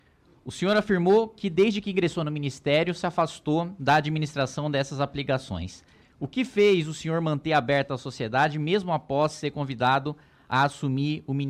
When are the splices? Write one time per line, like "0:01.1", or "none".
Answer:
0:06.0